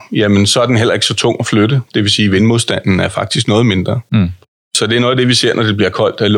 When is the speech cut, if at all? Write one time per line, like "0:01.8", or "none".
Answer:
none

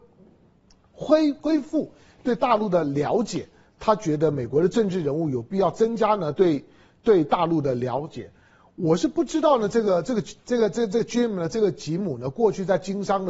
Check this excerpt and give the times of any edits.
none

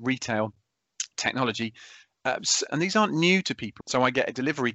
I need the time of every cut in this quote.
0:01.1
0:02.7
0:03.8

